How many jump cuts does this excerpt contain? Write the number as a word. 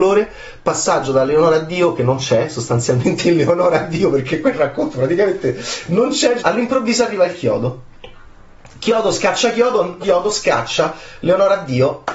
two